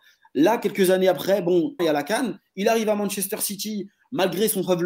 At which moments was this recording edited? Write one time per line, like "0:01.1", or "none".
0:01.8